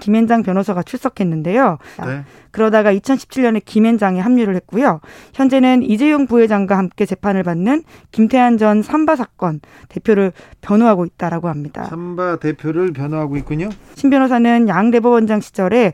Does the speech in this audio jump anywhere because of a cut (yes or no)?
yes